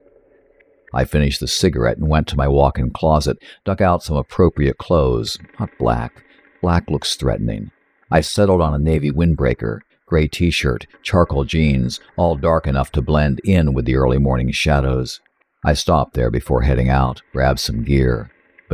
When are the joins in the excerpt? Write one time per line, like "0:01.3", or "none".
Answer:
0:15.5
0:17.3